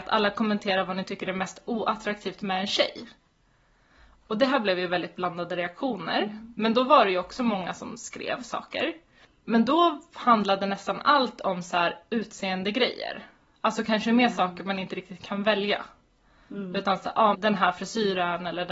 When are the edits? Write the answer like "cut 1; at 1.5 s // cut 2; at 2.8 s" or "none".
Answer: cut 1; at 17.3 s